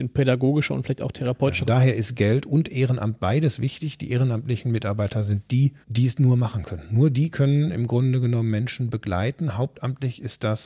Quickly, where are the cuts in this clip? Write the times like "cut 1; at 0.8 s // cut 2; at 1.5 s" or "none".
cut 1; at 1.7 s // cut 2; at 5.8 s